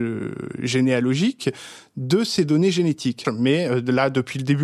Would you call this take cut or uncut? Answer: cut